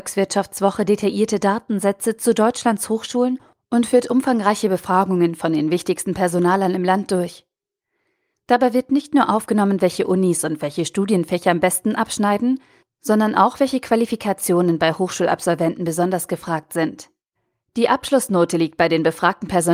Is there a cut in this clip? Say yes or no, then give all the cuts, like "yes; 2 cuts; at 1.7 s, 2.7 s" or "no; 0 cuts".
no; 0 cuts